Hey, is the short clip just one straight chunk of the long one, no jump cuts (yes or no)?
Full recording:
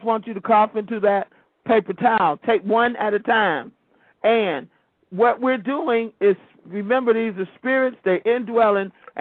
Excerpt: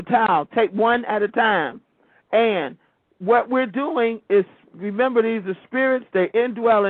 yes